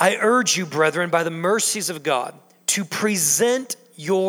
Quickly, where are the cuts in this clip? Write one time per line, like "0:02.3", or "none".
none